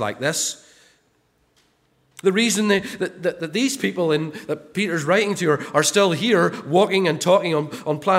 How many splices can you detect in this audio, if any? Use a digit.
1